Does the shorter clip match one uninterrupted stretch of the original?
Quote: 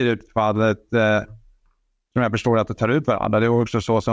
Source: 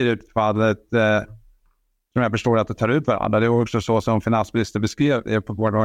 yes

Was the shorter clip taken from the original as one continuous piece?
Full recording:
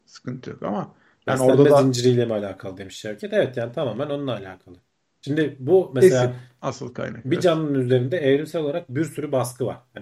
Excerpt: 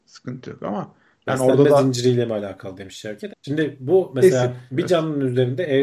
no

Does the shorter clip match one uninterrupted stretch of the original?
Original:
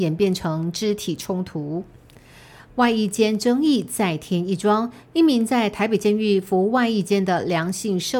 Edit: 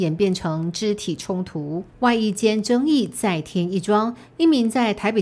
no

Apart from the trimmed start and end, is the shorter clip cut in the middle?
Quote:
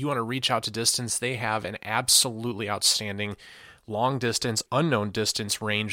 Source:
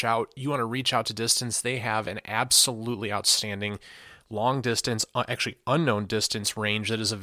yes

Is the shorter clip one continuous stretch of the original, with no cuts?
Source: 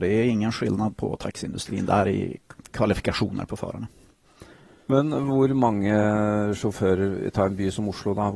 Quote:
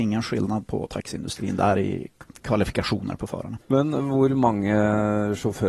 no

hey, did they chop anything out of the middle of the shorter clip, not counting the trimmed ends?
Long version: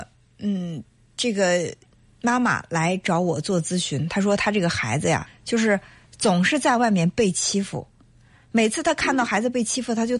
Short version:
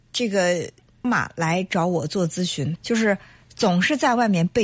yes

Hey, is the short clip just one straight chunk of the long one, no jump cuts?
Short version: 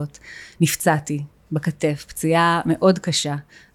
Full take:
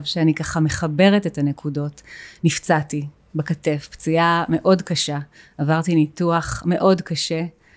yes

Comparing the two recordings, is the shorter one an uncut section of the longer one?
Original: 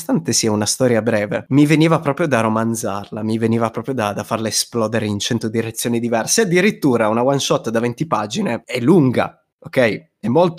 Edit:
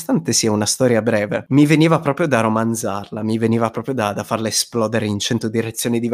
yes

